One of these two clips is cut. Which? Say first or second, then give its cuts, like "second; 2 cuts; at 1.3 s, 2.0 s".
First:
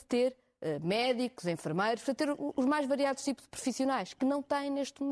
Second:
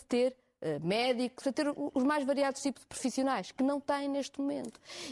second; 1 cut; at 1.4 s